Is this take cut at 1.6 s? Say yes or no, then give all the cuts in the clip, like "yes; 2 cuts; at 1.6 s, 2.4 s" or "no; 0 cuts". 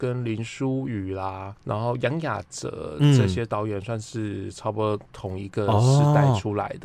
yes; 1 cut; at 1.6 s